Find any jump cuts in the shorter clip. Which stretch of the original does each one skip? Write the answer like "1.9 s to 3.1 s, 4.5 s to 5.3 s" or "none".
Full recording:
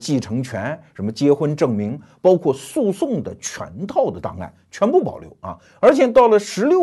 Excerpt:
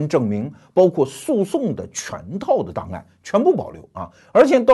none